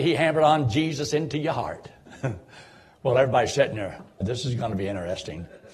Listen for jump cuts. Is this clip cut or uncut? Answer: cut